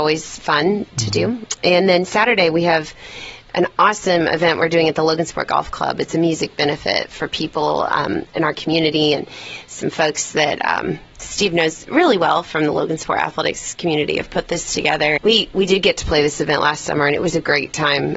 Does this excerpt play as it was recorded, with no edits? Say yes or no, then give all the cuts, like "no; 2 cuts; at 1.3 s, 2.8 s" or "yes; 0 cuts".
no; 1 cut; at 15.2 s